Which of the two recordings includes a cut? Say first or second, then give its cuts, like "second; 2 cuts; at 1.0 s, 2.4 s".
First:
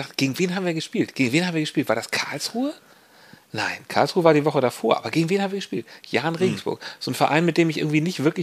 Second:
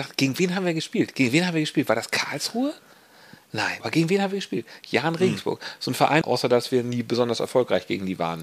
second; 2 cuts; at 3.8 s, 6.2 s